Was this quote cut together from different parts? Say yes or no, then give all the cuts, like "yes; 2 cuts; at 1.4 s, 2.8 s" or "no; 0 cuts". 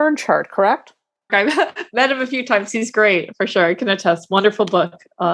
yes; 1 cut; at 1.3 s